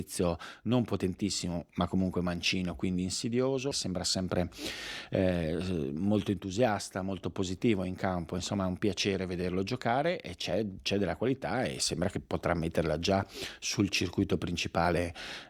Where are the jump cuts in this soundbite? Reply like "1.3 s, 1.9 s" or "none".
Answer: 3.7 s